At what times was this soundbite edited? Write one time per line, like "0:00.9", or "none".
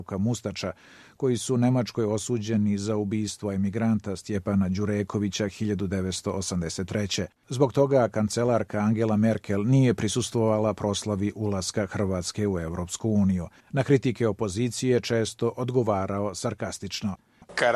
0:07.4